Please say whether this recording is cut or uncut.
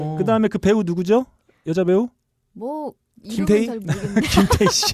uncut